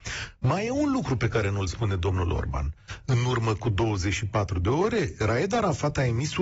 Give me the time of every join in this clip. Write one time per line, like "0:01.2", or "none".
none